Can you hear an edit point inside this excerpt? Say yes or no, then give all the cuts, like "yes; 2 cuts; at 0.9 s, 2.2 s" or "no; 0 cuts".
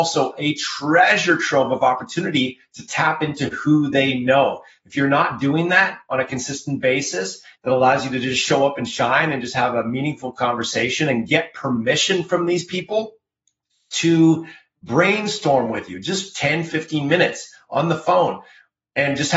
yes; 1 cut; at 7.6 s